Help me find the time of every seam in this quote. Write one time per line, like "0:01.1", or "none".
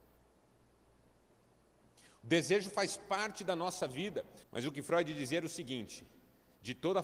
0:04.4